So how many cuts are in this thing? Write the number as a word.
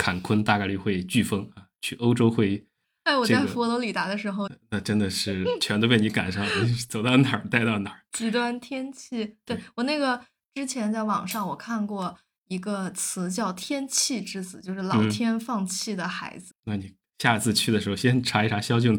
three